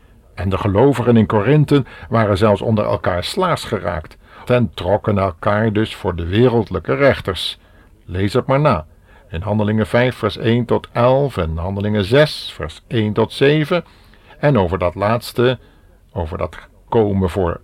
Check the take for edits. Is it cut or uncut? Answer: cut